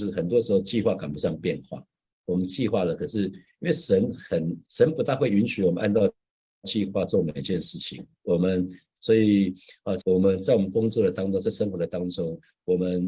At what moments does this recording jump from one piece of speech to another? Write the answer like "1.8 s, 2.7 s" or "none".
4.6 s, 9.0 s, 10.0 s